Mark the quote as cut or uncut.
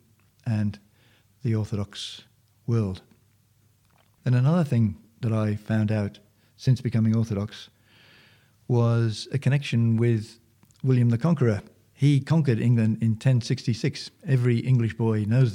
uncut